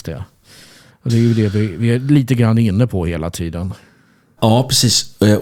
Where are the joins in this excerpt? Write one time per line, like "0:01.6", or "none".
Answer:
0:04.4